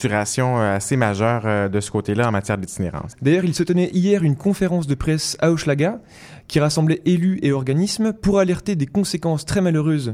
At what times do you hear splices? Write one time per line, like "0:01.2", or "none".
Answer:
0:03.1